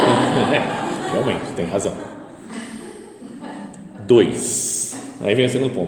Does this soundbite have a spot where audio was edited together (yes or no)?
no